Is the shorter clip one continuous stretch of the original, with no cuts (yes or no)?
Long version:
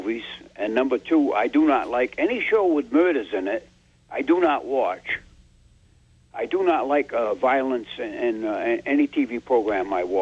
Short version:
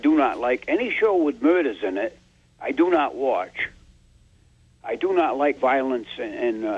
no